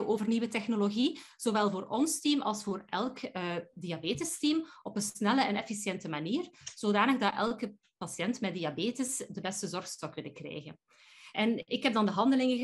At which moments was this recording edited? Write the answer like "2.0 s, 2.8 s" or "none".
11.3 s